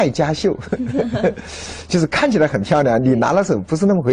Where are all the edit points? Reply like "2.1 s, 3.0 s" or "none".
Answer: none